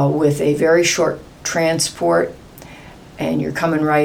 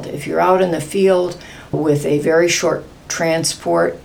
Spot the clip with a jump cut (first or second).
second